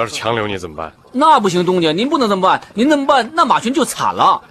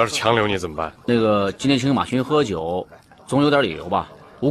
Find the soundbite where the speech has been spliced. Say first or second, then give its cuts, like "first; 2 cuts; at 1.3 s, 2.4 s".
second; 1 cut; at 1.1 s